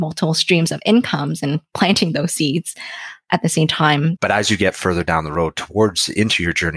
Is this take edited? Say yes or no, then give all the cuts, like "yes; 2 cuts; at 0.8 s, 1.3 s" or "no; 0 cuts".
yes; 1 cut; at 4.2 s